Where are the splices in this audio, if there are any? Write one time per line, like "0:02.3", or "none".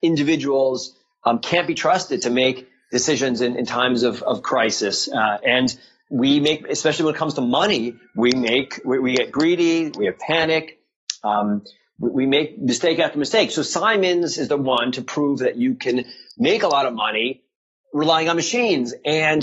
none